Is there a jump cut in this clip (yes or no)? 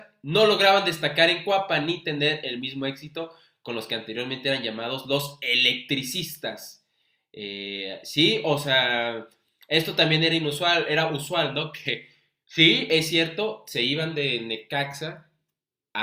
no